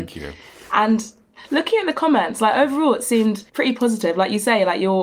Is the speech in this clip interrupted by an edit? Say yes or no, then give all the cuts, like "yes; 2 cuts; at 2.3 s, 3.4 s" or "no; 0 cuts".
yes; 1 cut; at 3.5 s